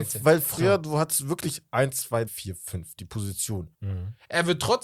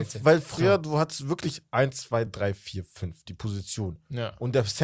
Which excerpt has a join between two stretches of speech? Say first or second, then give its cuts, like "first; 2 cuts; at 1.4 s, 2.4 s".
first; 2 cuts; at 2.3 s, 3.7 s